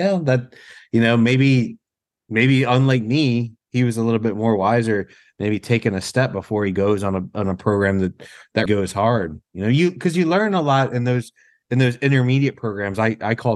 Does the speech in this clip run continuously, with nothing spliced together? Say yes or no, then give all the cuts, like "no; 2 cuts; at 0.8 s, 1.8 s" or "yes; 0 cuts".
no; 1 cut; at 8.7 s